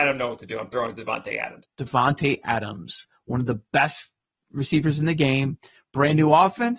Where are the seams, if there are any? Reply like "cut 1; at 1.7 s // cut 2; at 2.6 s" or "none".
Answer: cut 1; at 1.6 s